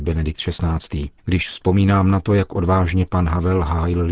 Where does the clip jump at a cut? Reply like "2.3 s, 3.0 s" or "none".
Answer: 1.2 s